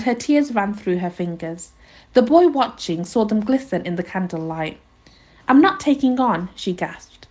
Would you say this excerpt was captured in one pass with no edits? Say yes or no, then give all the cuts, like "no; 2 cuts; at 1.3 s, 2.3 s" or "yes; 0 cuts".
yes; 0 cuts